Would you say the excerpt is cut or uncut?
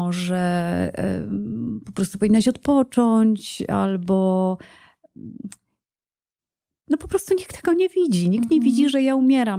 uncut